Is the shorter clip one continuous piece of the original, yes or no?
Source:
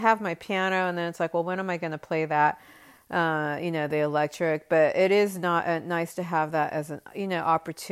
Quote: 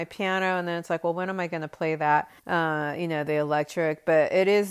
no